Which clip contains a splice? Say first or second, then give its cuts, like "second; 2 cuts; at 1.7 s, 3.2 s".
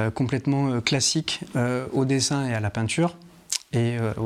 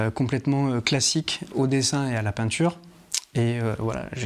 second; 1 cut; at 1.5 s